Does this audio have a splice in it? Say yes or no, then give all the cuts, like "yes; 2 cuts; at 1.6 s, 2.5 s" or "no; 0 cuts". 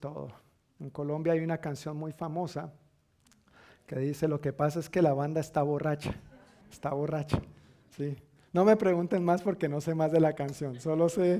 yes; 1 cut; at 6.6 s